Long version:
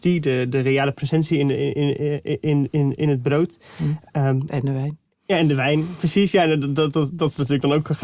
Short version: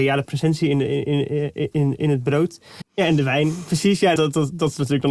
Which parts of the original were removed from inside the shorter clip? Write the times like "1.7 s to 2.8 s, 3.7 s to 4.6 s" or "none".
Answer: 2.4 s to 2.7 s, 3.8 s to 5.1 s, 6.5 s to 6.8 s